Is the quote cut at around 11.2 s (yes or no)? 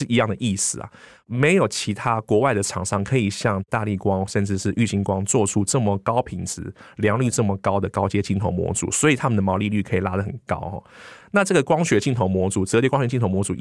yes